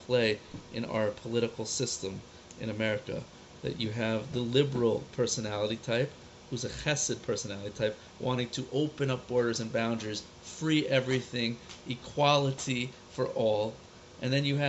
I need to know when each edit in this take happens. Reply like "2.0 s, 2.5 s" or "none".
none